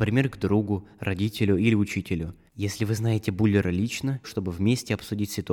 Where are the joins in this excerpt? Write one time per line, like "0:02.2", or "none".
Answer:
0:02.5
0:04.2